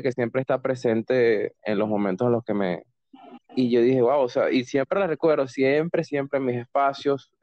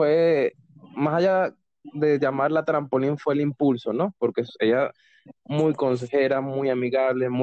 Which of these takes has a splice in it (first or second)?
first